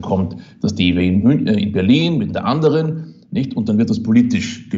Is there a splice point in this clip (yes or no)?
no